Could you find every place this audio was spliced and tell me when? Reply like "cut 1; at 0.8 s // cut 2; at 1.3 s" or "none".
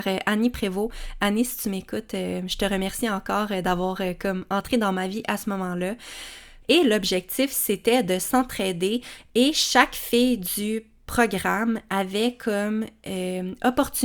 cut 1; at 6.6 s